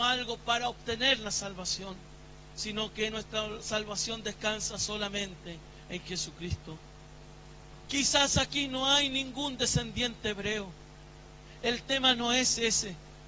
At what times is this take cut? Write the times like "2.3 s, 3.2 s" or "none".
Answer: 7.9 s